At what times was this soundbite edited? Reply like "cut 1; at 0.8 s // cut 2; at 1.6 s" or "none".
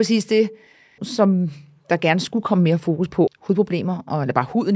cut 1; at 1.0 s // cut 2; at 3.3 s